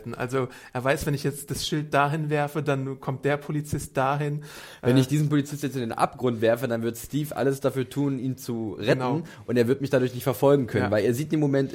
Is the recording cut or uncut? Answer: uncut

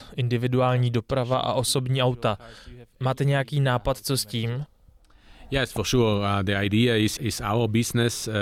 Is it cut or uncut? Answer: uncut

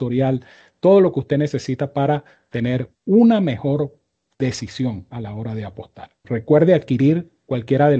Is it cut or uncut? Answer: cut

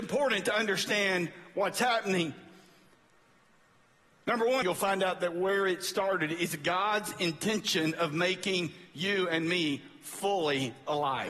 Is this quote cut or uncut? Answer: cut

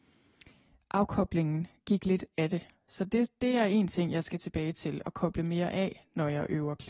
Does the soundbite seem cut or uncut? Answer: uncut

